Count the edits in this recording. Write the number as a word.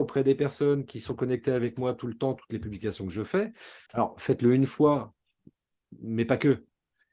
one